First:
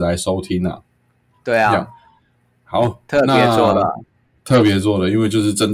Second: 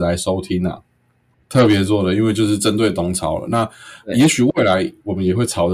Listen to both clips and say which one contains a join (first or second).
second